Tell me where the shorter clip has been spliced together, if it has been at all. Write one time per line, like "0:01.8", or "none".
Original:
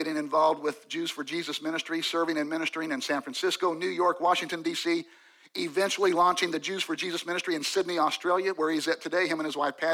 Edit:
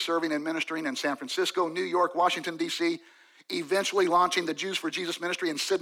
none